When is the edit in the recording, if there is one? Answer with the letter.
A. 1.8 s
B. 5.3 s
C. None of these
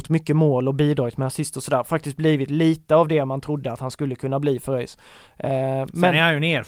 C